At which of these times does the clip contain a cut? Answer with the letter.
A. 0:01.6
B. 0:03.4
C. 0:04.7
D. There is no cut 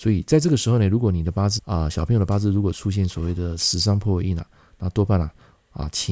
A